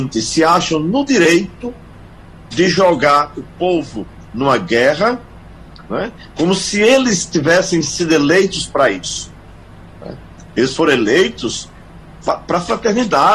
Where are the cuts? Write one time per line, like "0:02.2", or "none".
none